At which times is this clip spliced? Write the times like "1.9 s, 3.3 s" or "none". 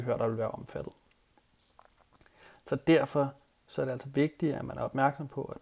none